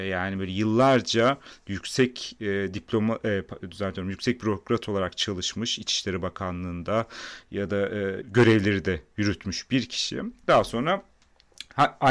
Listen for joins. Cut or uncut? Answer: cut